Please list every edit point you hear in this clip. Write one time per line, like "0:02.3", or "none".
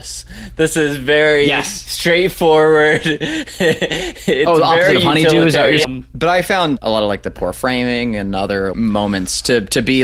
0:05.8
0:08.7